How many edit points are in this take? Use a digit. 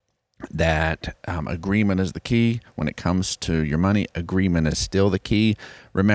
0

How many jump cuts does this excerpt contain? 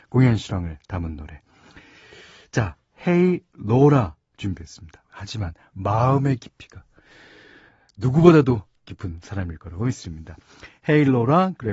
1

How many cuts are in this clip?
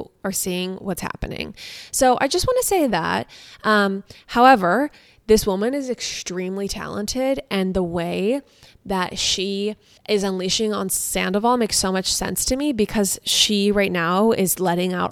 0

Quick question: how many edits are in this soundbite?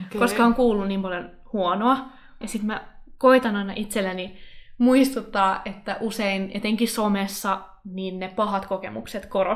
1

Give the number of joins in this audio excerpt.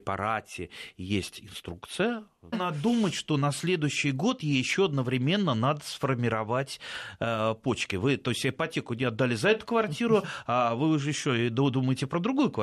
1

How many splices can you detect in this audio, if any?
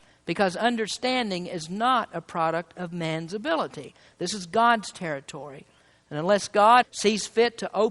1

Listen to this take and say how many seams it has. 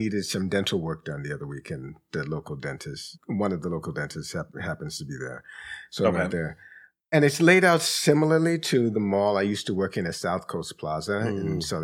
1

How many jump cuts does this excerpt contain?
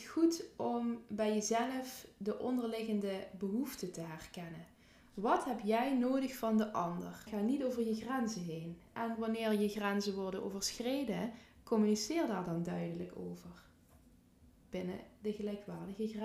1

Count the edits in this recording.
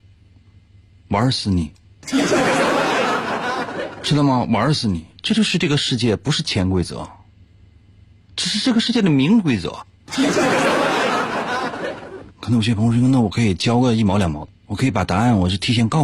2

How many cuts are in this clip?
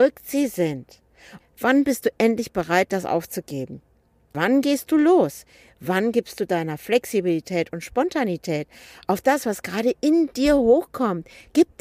1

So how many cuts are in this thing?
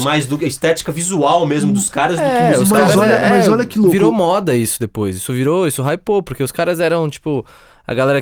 0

